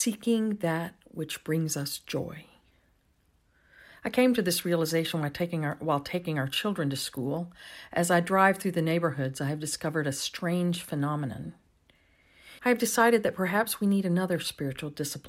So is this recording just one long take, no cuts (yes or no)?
no